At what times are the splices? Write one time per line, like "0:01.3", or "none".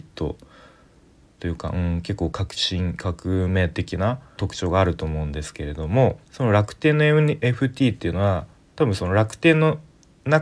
0:04.4
0:06.2
0:07.4